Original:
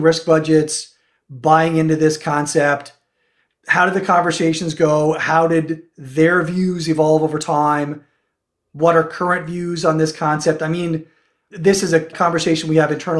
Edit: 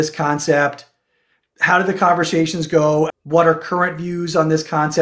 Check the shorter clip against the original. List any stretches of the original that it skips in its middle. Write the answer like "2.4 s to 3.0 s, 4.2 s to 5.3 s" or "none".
5.2 s to 8.6 s

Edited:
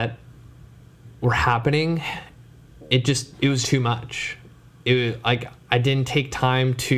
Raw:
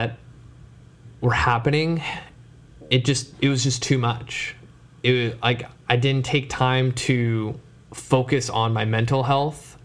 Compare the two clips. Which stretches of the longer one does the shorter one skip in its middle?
3.6 s to 3.8 s

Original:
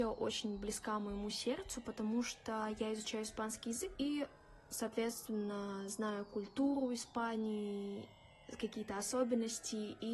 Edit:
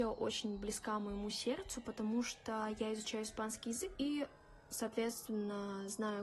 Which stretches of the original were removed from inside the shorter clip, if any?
none

